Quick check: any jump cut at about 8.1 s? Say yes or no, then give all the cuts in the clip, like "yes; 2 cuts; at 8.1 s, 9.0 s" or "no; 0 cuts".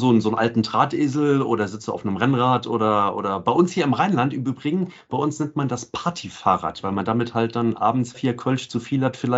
yes; 1 cut; at 8.1 s